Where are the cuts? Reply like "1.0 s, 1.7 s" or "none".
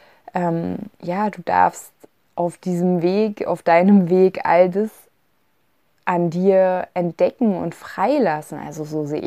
0.9 s